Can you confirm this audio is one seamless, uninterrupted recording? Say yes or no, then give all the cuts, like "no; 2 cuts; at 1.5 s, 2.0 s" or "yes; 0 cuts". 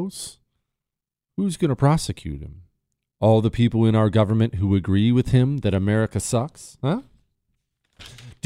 yes; 0 cuts